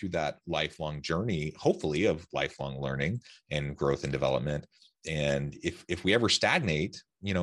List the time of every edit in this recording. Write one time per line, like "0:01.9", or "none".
none